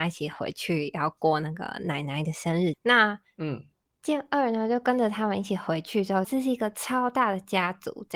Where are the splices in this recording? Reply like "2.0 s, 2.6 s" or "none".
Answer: 2.7 s, 6.2 s

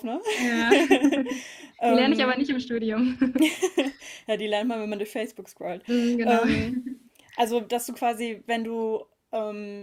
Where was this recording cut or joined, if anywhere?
none

